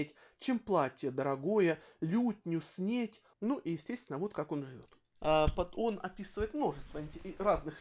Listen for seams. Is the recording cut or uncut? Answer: cut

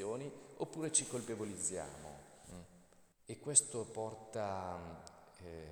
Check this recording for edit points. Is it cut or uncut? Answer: cut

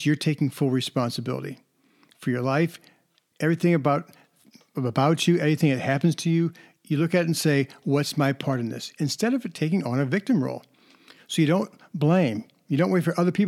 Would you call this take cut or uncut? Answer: uncut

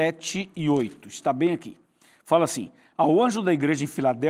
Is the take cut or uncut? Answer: uncut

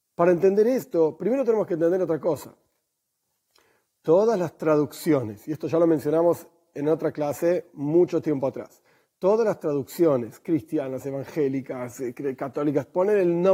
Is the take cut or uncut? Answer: uncut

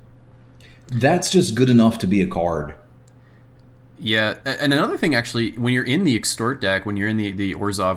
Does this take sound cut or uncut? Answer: uncut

